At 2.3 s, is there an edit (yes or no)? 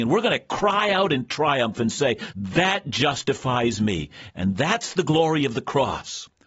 yes